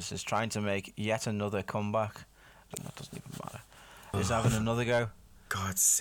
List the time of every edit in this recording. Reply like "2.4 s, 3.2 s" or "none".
2.8 s, 4.1 s